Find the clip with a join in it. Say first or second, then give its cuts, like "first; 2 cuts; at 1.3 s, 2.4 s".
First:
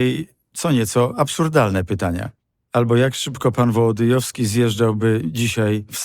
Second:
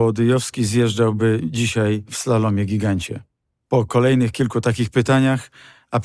first; 1 cut; at 2.5 s